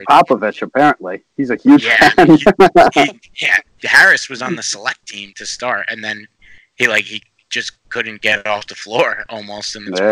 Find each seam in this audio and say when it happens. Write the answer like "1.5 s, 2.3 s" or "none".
none